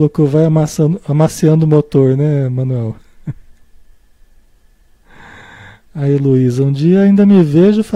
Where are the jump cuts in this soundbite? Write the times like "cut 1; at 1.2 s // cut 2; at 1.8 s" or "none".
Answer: none